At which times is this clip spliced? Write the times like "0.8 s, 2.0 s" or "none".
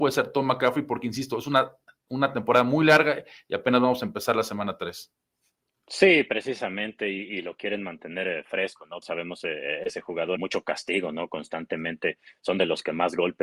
9.0 s, 10.4 s